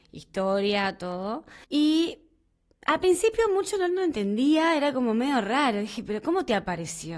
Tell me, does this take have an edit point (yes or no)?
yes